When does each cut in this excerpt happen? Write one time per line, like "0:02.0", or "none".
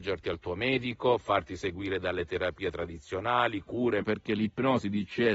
0:04.0